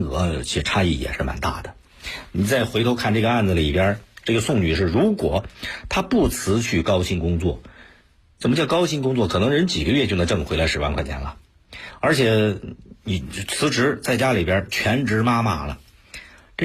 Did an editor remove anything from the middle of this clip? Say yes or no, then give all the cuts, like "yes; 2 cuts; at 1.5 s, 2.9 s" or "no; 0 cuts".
no; 0 cuts